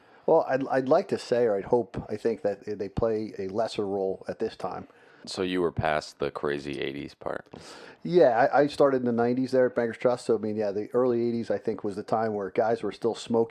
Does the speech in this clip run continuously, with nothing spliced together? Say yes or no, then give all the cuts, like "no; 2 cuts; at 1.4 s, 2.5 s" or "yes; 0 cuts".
no; 1 cut; at 5.2 s